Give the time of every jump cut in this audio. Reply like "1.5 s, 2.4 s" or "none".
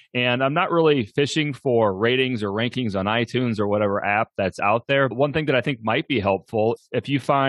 5.1 s

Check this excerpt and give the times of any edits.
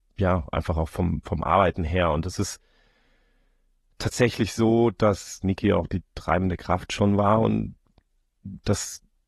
none

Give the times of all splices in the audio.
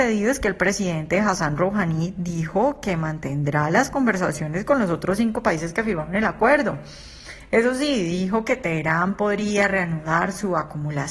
none

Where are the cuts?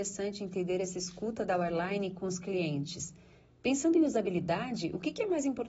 none

